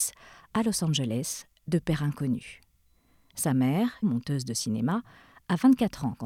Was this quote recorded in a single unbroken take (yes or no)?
no